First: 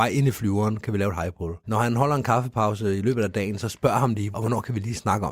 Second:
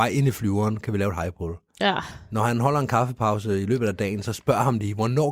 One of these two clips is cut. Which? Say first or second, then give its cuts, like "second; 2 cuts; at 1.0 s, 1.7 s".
first; 2 cuts; at 1.6 s, 4.3 s